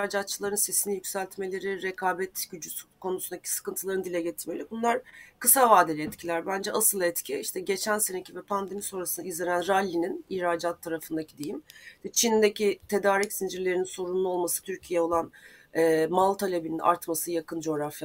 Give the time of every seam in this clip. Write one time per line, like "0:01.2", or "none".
0:14.6